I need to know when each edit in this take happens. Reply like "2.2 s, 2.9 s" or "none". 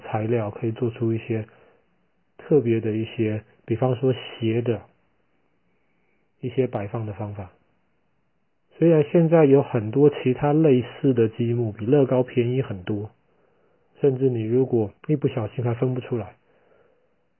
8.6 s, 13.9 s, 15.0 s